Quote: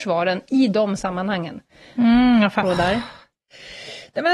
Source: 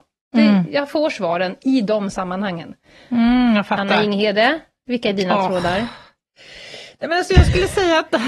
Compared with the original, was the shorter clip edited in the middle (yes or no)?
yes